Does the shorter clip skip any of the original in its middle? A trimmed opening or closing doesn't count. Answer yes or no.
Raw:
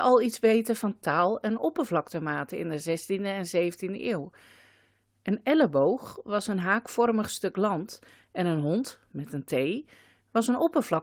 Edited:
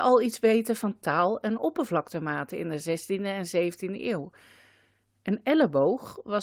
no